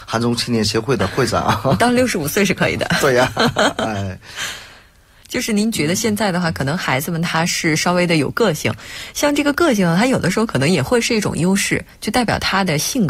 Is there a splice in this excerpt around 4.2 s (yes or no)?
no